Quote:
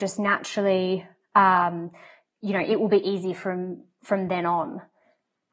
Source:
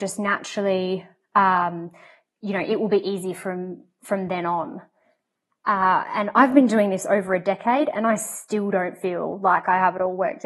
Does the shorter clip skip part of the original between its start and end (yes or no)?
no